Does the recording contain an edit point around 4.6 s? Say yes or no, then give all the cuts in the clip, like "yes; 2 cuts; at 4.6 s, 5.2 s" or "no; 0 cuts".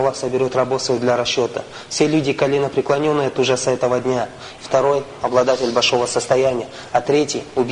yes; 1 cut; at 4.6 s